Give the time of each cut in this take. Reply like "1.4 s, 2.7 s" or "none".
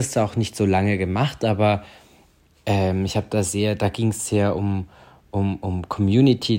none

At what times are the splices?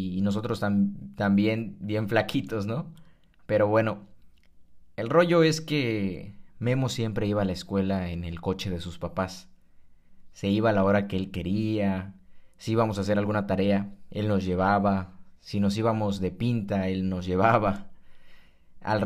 none

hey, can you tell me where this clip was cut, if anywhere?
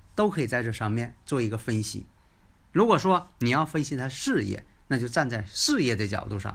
none

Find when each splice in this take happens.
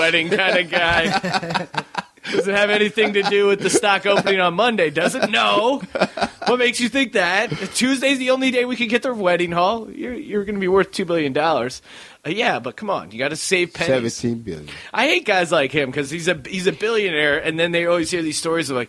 none

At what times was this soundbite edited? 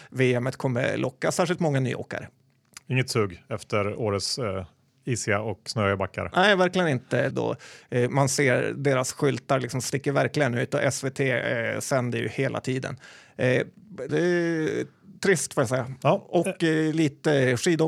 7.3 s, 14.1 s

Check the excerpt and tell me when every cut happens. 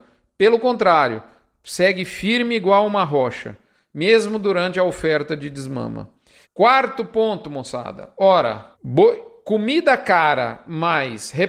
6.4 s, 8.7 s

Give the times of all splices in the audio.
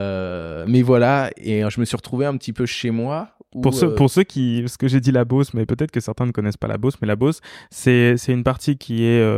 none

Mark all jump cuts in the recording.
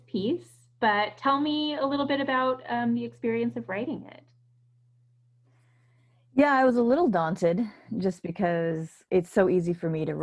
9.1 s

